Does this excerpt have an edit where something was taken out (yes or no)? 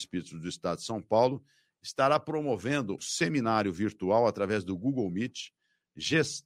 yes